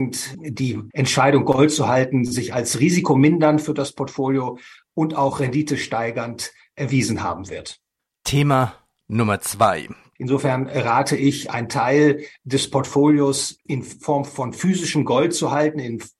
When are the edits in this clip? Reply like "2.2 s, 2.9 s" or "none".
10.2 s